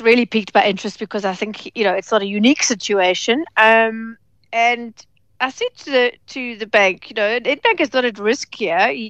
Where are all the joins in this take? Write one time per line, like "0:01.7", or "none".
none